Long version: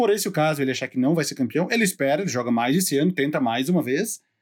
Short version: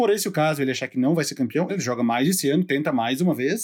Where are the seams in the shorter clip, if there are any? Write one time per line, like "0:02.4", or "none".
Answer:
0:01.7